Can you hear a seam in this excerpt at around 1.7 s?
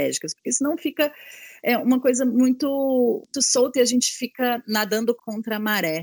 no; 1 cut; at 3.3 s

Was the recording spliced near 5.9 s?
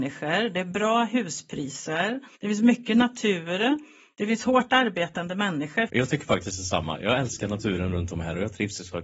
yes; 2 cuts; at 2.3 s, 5.9 s

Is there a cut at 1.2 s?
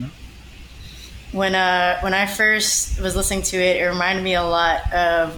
yes; 1 cut; at 1.2 s

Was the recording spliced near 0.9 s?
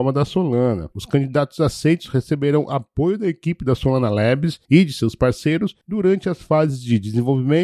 yes; 1 cut; at 0.9 s

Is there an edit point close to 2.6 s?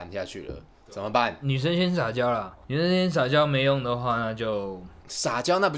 yes; 1 cut; at 2.6 s

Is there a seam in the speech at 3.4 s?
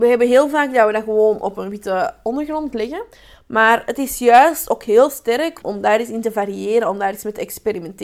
no; 1 cut; at 5.6 s

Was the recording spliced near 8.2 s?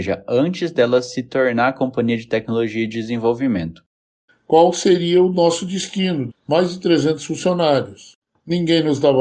no; 2 cuts; at 4.3 s, 6.3 s

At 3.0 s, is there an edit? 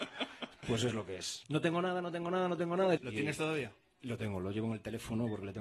yes; 2 cuts; at 1.4 s, 3.0 s

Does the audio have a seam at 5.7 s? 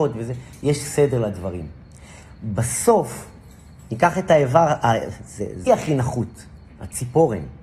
yes; 1 cut; at 5.7 s

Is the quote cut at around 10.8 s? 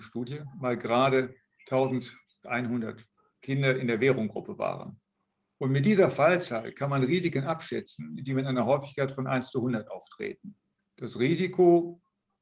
yes; 1 cut; at 10.8 s

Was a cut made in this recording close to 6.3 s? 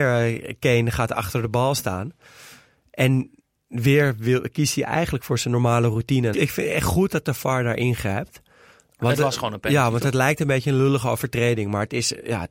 yes; 1 cut; at 6.3 s

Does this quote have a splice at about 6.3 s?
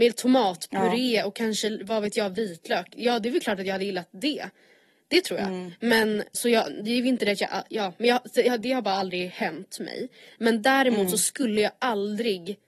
yes; 1 cut; at 6.3 s

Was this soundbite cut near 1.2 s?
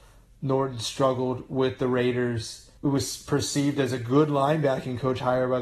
no; 1 cut; at 2.8 s

